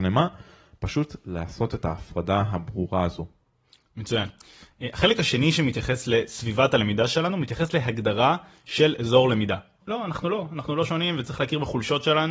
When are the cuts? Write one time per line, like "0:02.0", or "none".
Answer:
0:09.8